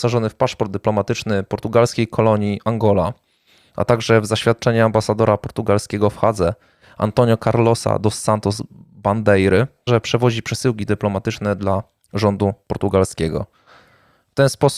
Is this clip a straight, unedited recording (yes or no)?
no